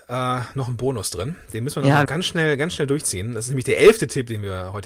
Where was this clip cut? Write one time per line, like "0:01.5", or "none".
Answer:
0:02.1